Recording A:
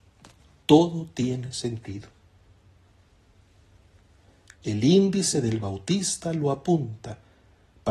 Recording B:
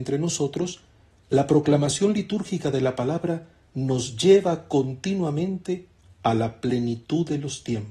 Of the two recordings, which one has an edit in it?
A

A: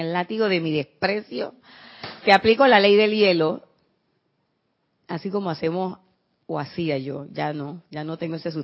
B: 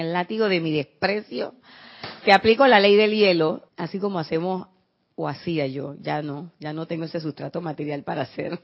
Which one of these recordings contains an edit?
B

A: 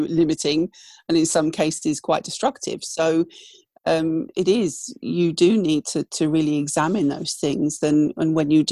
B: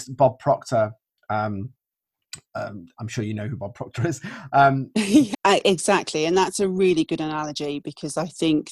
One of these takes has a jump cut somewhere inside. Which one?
B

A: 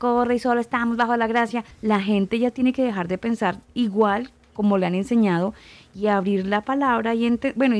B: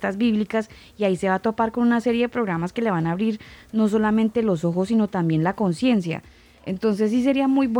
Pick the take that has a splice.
A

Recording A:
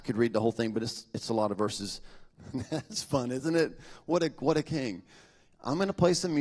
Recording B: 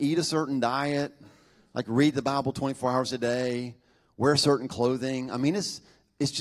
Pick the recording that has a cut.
A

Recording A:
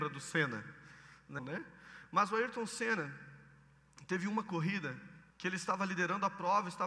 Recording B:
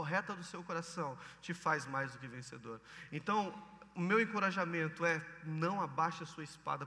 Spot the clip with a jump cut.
A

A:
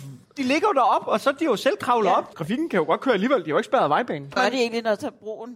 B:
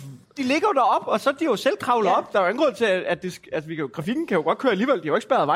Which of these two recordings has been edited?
A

